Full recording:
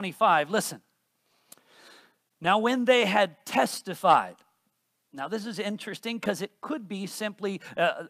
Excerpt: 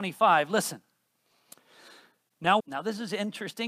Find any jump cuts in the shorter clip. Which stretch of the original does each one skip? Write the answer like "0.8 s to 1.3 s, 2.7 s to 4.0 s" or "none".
2.6 s to 5.1 s